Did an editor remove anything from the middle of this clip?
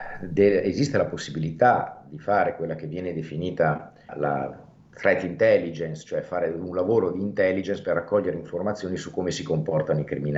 yes; 1 cut; at 4.1 s

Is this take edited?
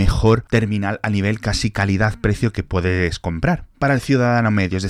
yes; 1 cut; at 3.7 s

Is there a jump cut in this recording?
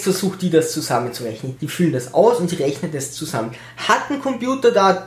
yes; 1 cut; at 1.6 s

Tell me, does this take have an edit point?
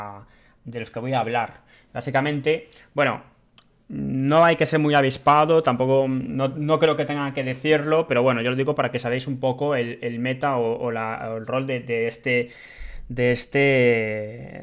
no; 0 cuts

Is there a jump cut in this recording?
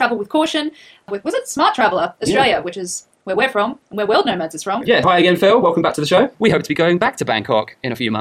yes; 2 cuts; at 5.0 s, 6.3 s

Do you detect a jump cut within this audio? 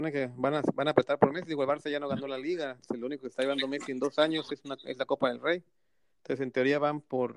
no; 0 cuts

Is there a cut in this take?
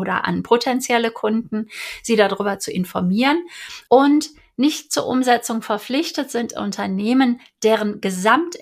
yes; 1 cut; at 3.9 s

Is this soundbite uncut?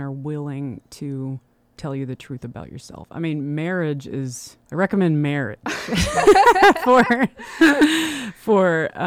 yes; 0 cuts

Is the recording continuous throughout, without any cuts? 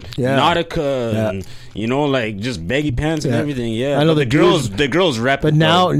yes; 0 cuts

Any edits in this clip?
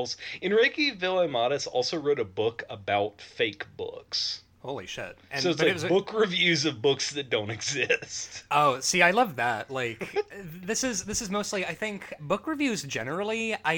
yes; 2 cuts; at 4.5 s, 12.2 s

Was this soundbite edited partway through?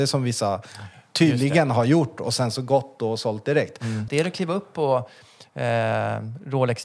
yes; 1 cut; at 4.1 s

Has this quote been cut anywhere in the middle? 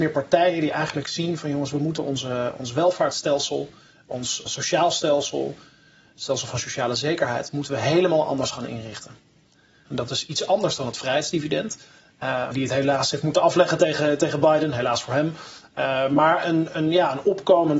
yes; 3 cuts; at 4.5 s, 9.9 s, 12.5 s

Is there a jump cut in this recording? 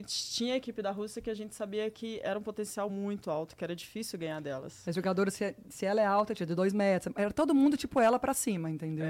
no; 0 cuts

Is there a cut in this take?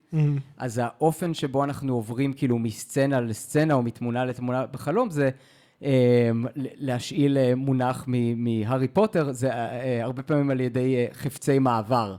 no; 0 cuts

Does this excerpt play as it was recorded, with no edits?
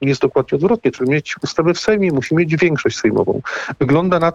no; 1 cut; at 0.9 s

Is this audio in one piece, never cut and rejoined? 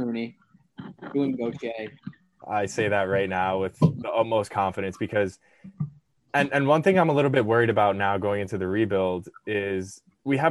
no; 1 cut; at 2.4 s

